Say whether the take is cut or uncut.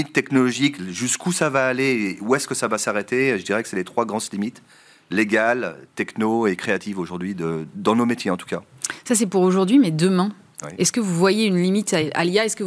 uncut